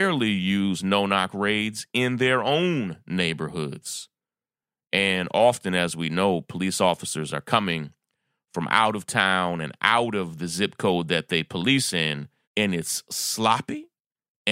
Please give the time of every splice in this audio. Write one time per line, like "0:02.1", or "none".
0:12.4

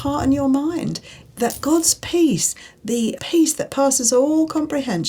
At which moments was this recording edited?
0:03.2

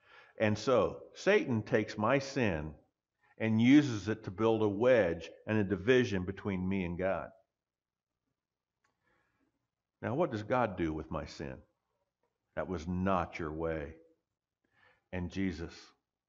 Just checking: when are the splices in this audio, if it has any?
0:12.5

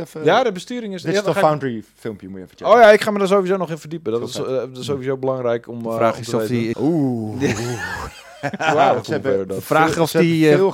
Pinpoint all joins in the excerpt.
0:06.7
0:09.0

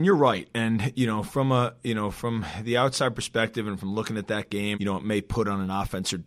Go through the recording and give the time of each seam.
0:04.7

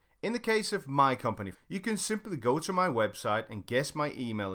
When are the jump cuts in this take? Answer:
0:01.5

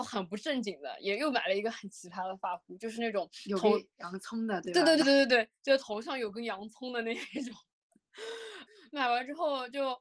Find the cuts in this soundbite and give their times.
0:05.0

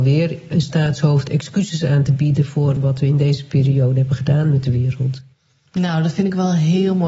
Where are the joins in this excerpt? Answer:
0:02.8

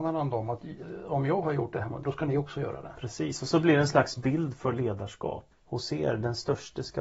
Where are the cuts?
0:02.0
0:05.5

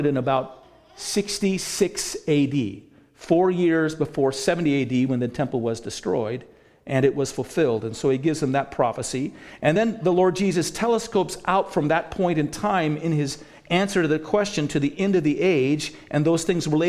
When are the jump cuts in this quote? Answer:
none

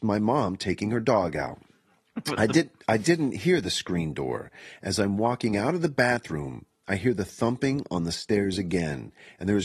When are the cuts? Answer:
none

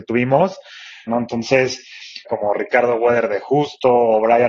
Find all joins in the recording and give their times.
0:01.1
0:02.2

